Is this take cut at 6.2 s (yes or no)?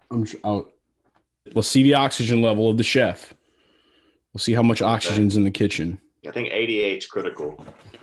yes